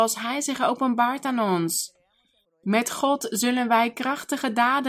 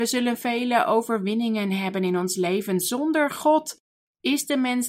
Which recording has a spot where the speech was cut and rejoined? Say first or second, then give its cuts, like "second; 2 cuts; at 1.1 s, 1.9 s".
first; 1 cut; at 2.4 s